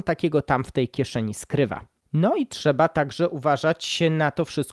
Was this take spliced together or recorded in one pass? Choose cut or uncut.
uncut